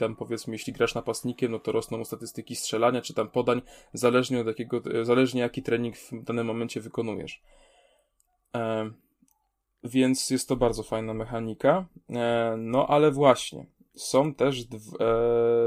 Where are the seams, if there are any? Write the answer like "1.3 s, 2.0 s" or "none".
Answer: none